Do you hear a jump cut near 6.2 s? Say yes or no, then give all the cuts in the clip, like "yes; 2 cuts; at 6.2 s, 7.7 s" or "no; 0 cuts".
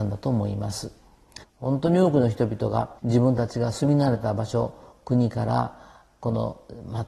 no; 2 cuts; at 1.4 s, 3.0 s